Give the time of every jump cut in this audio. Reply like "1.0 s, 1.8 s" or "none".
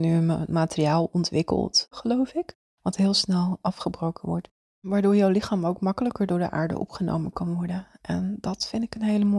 1.9 s